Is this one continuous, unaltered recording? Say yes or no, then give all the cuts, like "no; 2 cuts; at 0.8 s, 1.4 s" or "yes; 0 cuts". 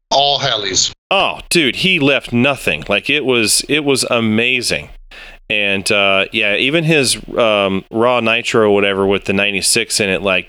yes; 0 cuts